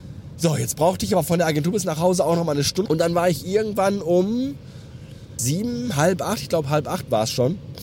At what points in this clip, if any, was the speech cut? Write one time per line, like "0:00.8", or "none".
0:02.9
0:05.4